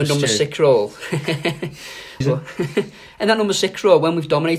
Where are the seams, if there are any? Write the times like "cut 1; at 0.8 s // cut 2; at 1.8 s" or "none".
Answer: cut 1; at 2.2 s